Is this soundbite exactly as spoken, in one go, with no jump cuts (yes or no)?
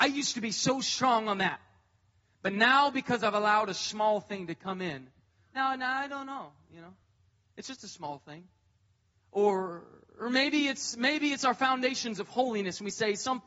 yes